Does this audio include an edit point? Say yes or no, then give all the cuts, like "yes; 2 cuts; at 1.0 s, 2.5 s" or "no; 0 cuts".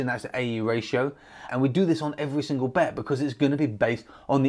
yes; 1 cut; at 1.5 s